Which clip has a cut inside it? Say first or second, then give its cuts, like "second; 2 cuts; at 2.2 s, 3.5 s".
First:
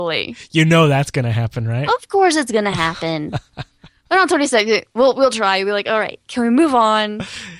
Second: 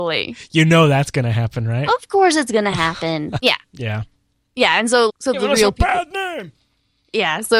second; 2 cuts; at 3.4 s, 5.1 s